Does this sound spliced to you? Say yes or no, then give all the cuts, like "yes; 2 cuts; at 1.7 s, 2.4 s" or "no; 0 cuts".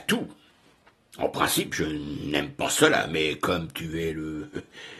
no; 0 cuts